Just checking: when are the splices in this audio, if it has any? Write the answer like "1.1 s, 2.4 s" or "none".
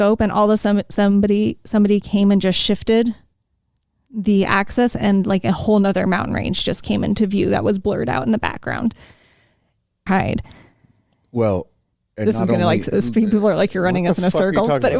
10.1 s